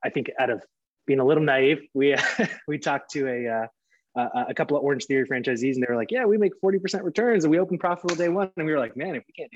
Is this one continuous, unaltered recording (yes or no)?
yes